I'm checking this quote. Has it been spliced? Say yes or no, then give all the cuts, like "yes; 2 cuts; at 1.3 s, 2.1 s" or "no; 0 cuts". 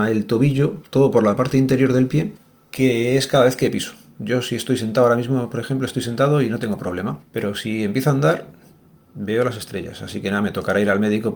no; 0 cuts